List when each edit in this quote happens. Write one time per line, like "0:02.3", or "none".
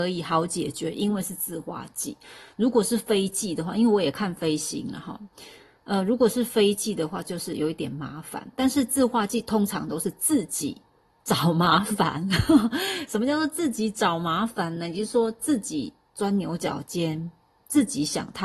none